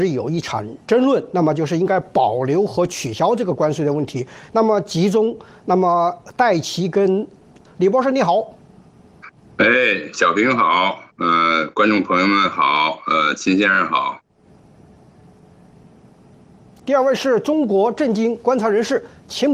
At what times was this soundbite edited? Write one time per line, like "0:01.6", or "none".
0:07.6